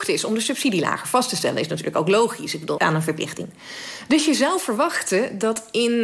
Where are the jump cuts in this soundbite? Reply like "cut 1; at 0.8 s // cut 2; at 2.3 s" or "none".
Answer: cut 1; at 2.8 s